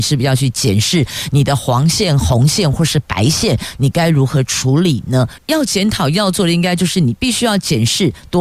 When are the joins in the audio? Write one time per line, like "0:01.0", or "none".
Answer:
0:05.4